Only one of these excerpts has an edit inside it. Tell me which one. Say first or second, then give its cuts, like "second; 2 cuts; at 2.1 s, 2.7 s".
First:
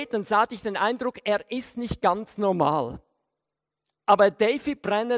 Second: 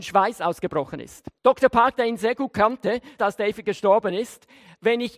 second; 2 cuts; at 1.4 s, 3.2 s